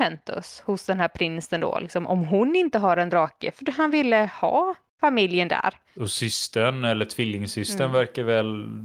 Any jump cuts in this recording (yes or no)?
yes